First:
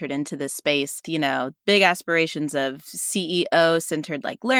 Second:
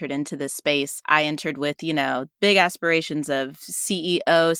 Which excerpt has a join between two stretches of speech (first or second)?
first